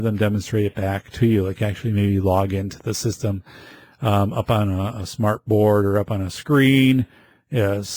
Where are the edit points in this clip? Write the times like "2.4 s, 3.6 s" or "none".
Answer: none